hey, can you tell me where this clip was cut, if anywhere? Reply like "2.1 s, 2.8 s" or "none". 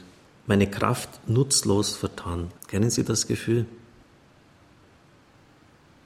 2.6 s